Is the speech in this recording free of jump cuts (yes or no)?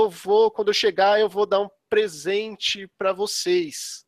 yes